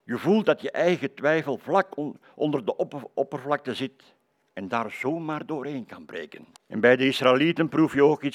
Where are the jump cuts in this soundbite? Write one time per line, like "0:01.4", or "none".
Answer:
0:06.6